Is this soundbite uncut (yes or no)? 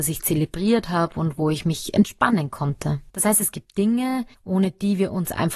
no